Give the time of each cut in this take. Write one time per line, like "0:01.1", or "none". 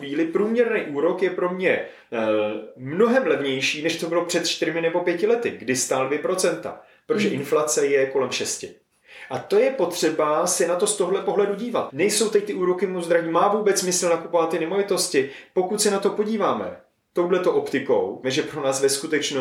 0:11.9
0:18.2